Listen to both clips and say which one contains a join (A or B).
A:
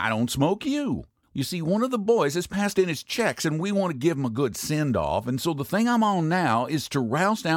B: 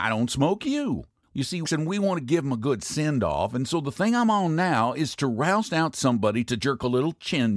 B